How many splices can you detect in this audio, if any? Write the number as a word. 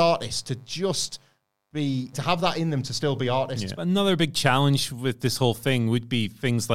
two